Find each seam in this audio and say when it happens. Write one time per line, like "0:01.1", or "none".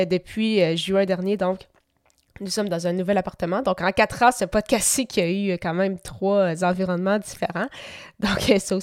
none